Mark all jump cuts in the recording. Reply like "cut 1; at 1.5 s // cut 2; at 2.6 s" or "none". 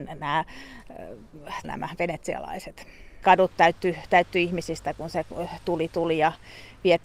cut 1; at 1.6 s // cut 2; at 3.2 s

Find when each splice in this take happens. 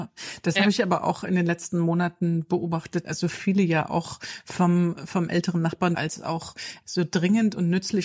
cut 1; at 3.0 s // cut 2; at 5.9 s

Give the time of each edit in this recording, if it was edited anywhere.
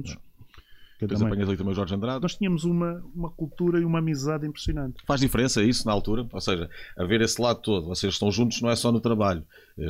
cut 1; at 1.0 s // cut 2; at 2.2 s

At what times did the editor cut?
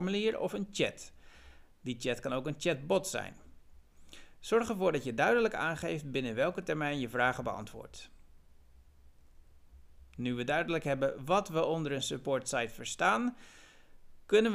none

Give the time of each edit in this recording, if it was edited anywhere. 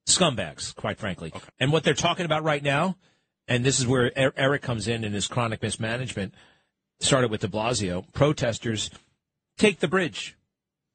cut 1; at 1.5 s // cut 2; at 9.6 s

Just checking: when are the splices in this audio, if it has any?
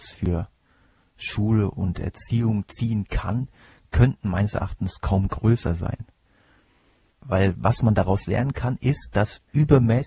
none

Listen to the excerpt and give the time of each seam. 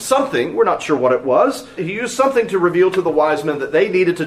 cut 1; at 1.8 s

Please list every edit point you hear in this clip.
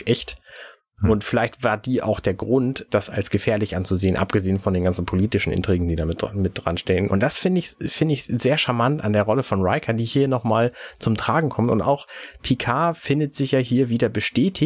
cut 1; at 7.1 s

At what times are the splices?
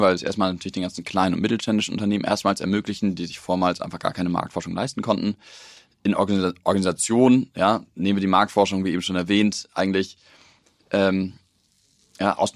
none

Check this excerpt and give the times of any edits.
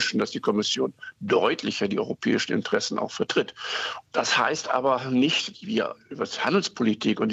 cut 1; at 4.0 s // cut 2; at 5.5 s

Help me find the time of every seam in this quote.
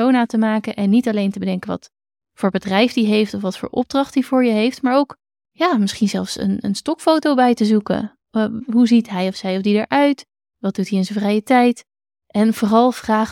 none

